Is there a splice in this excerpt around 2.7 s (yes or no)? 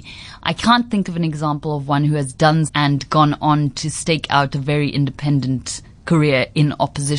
yes